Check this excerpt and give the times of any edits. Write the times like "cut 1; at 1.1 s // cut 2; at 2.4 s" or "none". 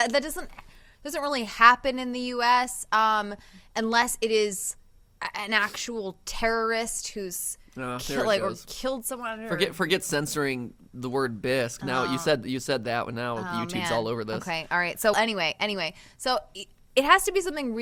cut 1; at 15.1 s

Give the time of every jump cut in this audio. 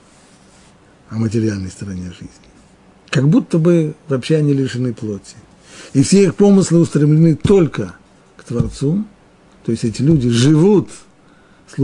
none

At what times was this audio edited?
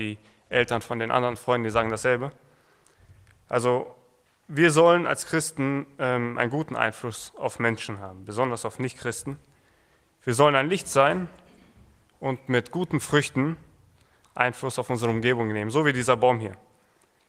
none

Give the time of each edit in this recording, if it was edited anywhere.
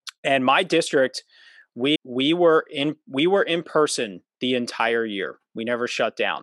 cut 1; at 2.0 s

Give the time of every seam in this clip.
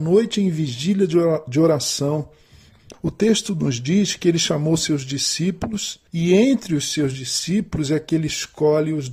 cut 1; at 2.9 s // cut 2; at 6.1 s

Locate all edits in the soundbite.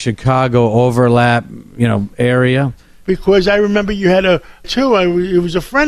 cut 1; at 3.0 s // cut 2; at 4.6 s

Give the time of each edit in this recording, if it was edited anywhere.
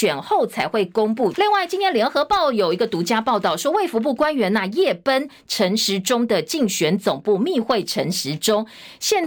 cut 1; at 1.3 s

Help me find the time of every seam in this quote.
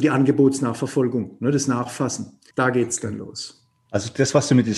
cut 1; at 2.5 s // cut 2; at 3.9 s

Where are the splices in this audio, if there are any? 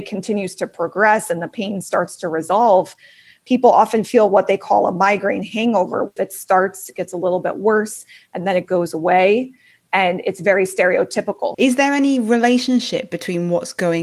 cut 1; at 6.2 s // cut 2; at 11.5 s

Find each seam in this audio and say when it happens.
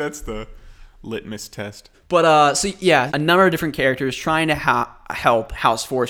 cut 1; at 1.9 s // cut 2; at 3.1 s

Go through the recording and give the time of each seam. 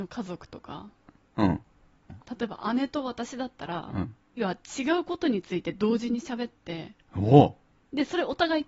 cut 1; at 2.1 s // cut 2; at 4.4 s // cut 3; at 7.0 s

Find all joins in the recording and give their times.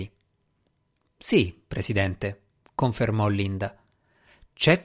none

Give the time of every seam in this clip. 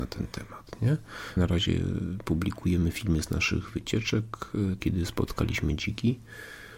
cut 1; at 1.4 s // cut 2; at 4.8 s

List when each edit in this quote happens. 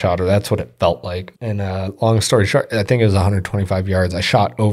cut 1; at 1.3 s

